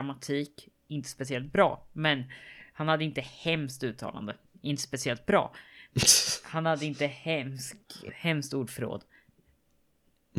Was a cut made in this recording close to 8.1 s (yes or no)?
yes